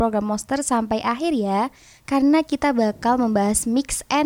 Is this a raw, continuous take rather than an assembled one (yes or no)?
yes